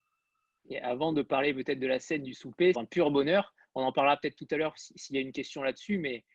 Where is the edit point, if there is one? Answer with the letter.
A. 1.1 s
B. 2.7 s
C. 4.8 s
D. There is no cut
B